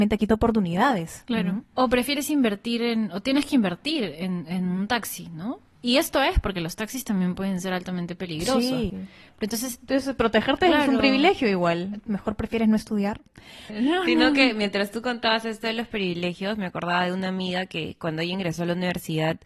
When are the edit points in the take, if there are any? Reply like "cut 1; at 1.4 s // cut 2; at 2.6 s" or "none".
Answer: cut 1; at 8.9 s // cut 2; at 12.1 s // cut 3; at 13.7 s